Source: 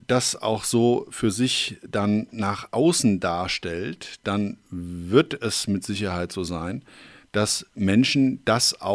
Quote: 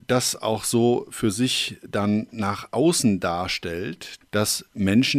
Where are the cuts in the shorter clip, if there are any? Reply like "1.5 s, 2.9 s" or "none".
4.2 s